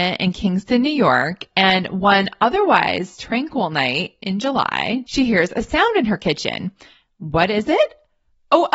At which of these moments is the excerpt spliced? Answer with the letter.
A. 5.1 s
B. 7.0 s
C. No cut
A